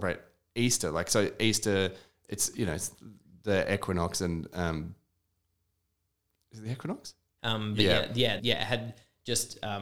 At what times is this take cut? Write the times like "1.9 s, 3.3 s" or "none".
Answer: 7.4 s, 8.4 s